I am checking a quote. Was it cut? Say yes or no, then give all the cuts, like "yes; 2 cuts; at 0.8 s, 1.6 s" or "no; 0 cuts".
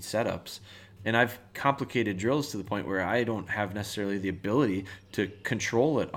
yes; 1 cut; at 1.0 s